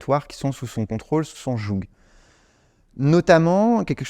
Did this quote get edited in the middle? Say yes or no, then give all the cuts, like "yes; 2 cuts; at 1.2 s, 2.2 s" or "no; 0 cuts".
no; 0 cuts